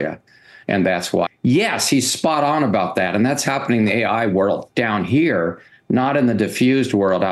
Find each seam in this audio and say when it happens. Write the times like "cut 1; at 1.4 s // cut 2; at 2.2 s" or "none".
cut 1; at 1.3 s